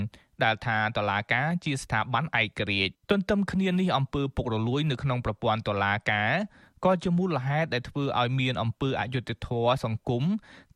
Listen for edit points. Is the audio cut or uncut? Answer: cut